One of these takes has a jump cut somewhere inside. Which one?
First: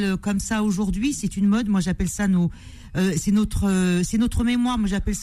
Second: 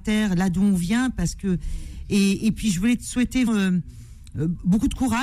second; 1 cut; at 3.5 s

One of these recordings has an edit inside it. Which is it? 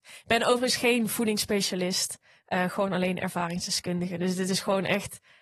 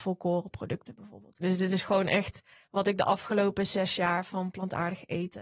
second; 1 cut; at 1.4 s

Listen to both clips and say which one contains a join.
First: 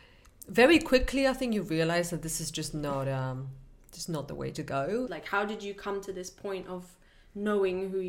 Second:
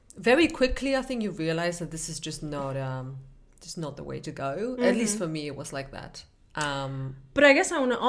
first; 1 cut; at 5.1 s

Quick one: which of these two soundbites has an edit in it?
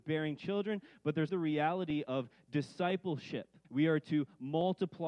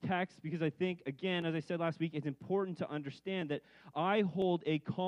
first; 2 cuts; at 1.3 s, 3.6 s

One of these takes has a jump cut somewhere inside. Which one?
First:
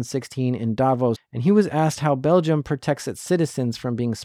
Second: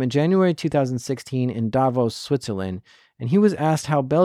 first; 1 cut; at 1.2 s

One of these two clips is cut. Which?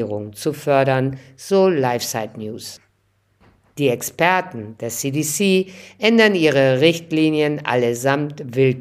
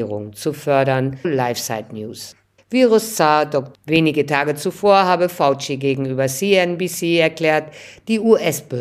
second; 3 cuts; at 1.2 s, 2.6 s, 3.7 s

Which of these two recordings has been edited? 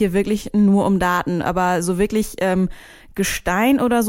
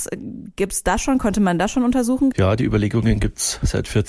second; 1 cut; at 2.3 s

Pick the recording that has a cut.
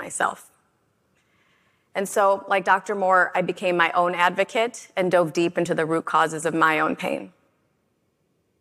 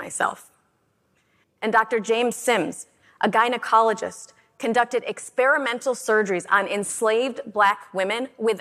second; 1 cut; at 1.4 s

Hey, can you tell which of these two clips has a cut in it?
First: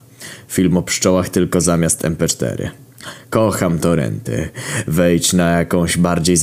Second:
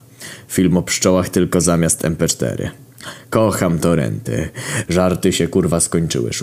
second; 1 cut; at 4.8 s

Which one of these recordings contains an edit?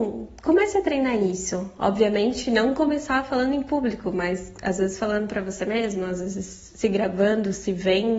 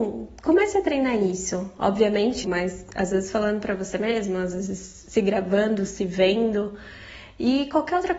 second; 1 cut; at 2.4 s

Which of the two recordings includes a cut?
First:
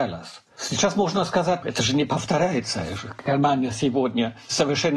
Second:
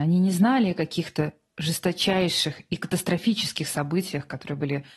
first; 1 cut; at 1.6 s

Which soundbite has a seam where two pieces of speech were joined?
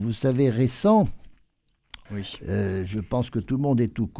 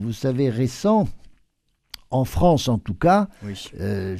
first; 1 cut; at 2.1 s

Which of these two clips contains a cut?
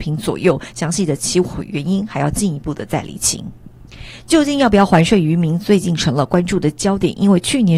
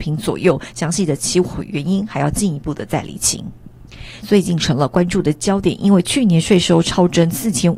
second; 1 cut; at 4.2 s

